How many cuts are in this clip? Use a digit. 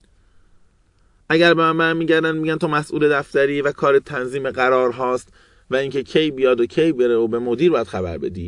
1